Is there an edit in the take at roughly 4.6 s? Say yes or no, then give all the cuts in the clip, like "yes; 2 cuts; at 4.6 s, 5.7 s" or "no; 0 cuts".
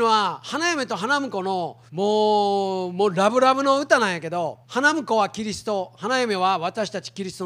yes; 2 cuts; at 1.9 s, 4.6 s